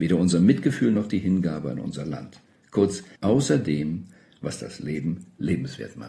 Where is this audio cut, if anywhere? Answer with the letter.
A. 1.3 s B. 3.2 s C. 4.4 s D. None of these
B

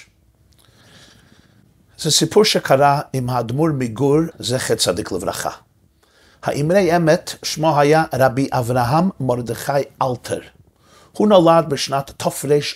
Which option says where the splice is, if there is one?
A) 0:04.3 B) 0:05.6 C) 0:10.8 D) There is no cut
A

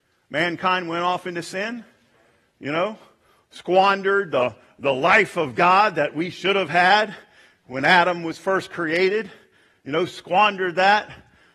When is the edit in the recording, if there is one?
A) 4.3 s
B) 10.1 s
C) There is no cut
C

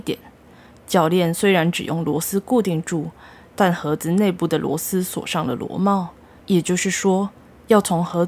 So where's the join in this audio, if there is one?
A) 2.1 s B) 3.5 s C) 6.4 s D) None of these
C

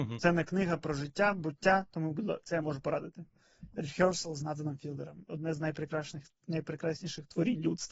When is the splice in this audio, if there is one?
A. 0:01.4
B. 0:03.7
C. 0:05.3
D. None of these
D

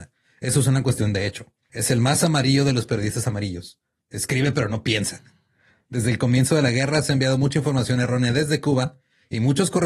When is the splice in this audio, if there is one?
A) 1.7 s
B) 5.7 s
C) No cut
A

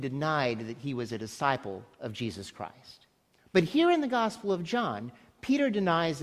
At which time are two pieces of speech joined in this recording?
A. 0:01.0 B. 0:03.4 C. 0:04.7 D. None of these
B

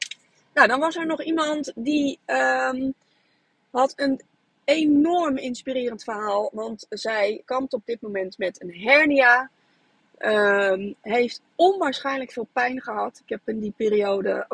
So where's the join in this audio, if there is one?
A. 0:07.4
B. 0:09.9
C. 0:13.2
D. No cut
A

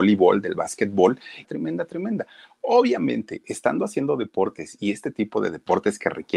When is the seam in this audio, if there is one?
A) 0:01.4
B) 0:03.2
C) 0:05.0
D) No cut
A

